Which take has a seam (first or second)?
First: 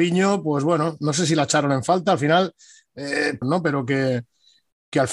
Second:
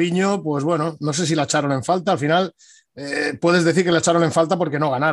first